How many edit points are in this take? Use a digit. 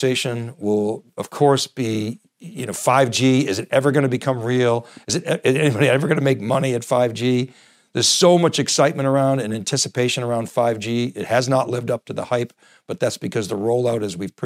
0